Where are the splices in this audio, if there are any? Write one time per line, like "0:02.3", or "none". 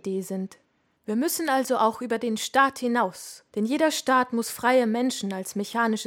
0:00.9
0:03.5